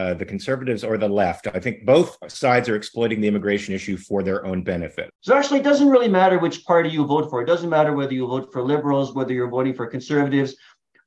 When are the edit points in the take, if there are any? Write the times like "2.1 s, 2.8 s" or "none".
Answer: 5.1 s